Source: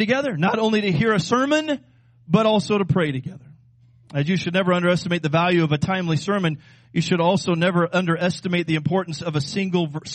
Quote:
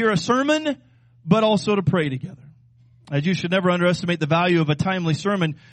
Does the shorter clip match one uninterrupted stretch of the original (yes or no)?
yes